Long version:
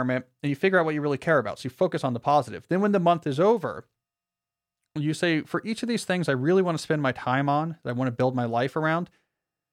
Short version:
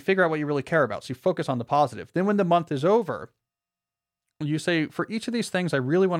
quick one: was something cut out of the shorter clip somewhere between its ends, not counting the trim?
no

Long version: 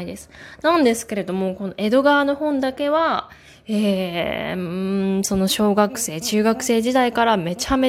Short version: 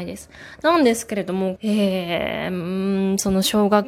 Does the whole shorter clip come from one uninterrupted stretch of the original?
no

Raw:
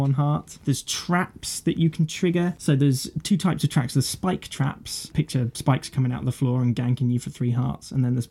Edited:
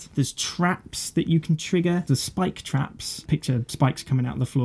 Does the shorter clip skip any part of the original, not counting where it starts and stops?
yes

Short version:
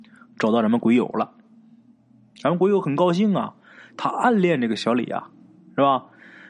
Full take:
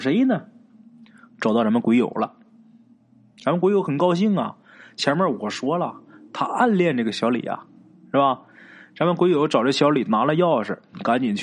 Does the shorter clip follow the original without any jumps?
no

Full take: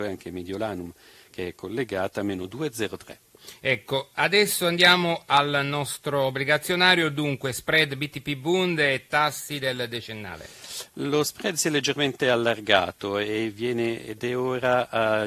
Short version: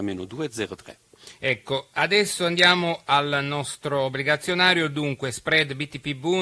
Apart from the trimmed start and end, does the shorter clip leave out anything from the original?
no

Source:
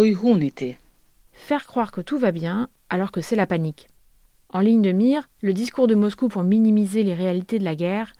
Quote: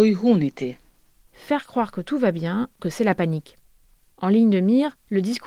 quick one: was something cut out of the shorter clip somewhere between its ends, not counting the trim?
yes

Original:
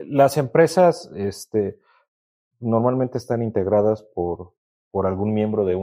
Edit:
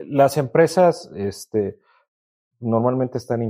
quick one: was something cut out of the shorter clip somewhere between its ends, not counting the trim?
no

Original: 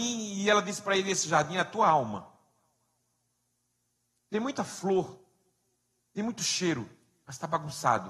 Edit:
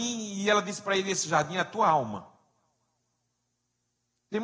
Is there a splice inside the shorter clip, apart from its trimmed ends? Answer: no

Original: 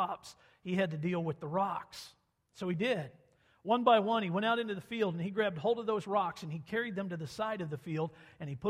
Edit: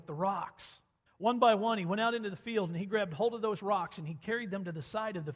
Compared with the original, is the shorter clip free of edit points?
no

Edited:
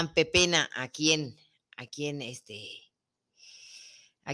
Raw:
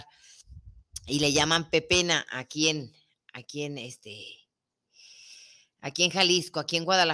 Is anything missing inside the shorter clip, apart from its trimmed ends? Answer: no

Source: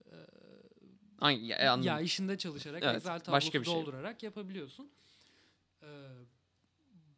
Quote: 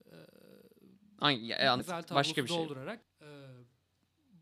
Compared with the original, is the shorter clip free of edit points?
no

